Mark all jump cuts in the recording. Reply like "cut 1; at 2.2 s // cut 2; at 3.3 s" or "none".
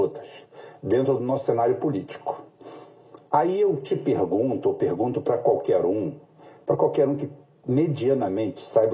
none